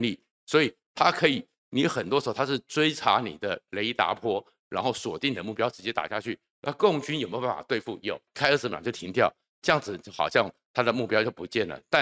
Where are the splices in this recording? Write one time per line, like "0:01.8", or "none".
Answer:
0:08.3

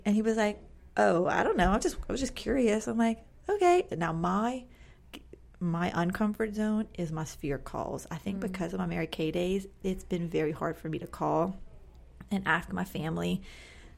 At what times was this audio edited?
0:03.9

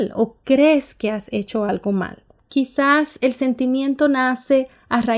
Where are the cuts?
0:02.4

